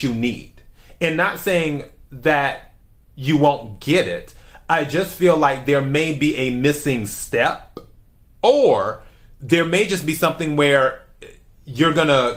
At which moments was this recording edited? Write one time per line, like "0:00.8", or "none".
none